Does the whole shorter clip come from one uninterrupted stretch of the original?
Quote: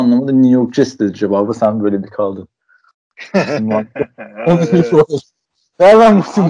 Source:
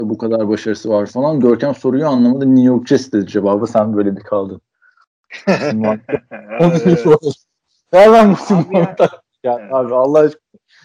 yes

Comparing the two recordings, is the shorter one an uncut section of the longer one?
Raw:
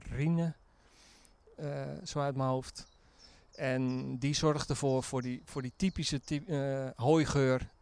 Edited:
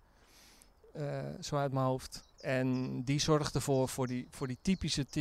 no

